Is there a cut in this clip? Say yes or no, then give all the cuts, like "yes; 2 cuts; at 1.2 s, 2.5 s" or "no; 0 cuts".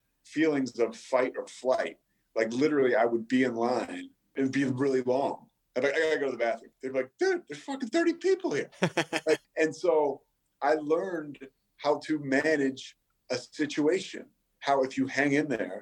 no; 0 cuts